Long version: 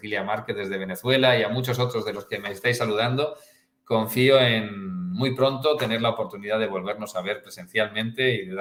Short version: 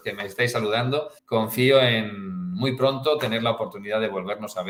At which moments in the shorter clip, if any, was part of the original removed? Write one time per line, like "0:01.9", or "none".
0:01.2

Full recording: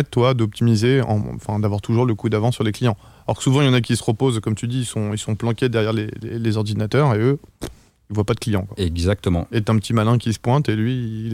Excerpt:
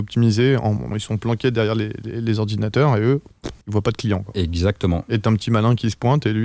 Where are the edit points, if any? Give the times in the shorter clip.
0:00.9
0:03.6

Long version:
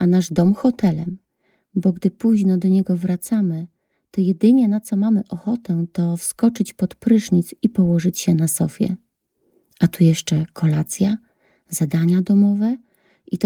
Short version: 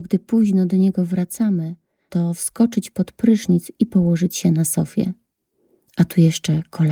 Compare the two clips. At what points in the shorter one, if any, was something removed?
0:02.1

